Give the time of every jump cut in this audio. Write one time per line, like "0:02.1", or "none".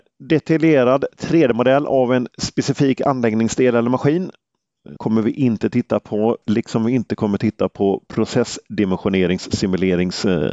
0:05.0
0:06.4